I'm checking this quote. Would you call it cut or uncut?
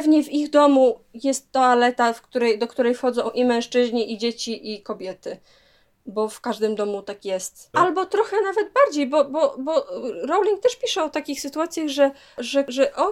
cut